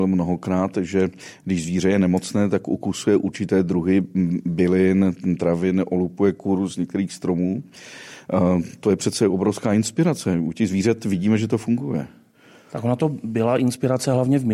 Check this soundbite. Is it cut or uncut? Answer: uncut